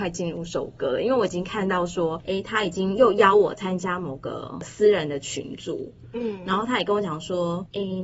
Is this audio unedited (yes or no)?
yes